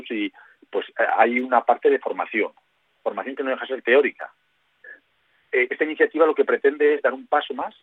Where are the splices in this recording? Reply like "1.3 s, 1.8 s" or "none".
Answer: none

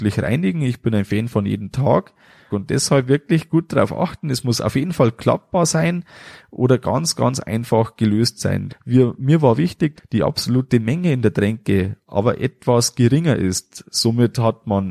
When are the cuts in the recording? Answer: 2.5 s, 8.7 s, 10.0 s

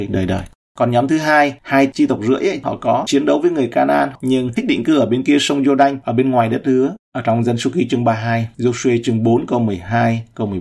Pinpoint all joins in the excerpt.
none

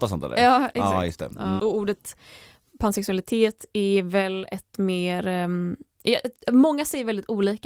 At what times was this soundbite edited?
1.6 s

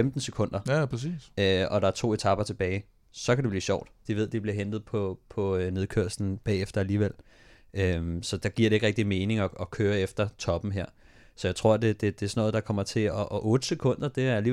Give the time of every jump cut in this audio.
4.1 s

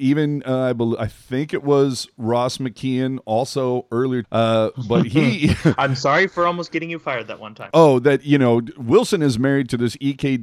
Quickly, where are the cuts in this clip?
4.2 s, 7.7 s

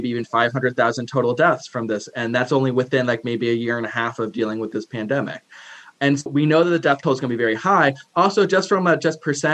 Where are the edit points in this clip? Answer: 6.3 s

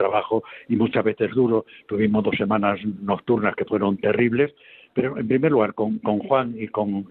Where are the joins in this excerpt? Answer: none

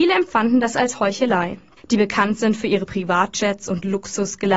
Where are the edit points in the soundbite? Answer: 1.8 s

